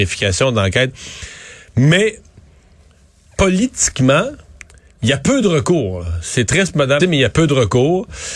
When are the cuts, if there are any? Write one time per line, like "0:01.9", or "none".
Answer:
0:07.0